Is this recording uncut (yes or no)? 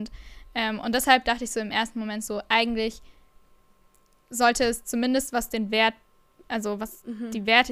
yes